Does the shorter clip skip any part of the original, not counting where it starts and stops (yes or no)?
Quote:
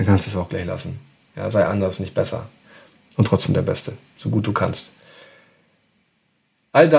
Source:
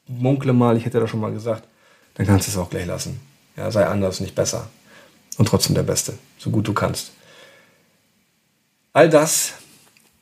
no